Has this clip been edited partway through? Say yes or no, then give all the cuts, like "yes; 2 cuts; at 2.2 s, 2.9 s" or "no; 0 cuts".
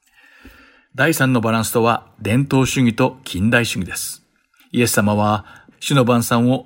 yes; 1 cut; at 5.7 s